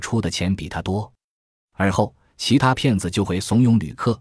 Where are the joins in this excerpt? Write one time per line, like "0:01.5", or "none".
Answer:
none